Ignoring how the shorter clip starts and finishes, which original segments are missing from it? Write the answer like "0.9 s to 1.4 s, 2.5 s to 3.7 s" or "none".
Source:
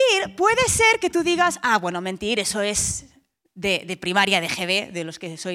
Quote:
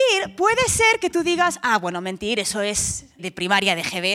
3.2 s to 3.8 s